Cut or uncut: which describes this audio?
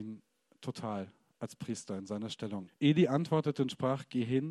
cut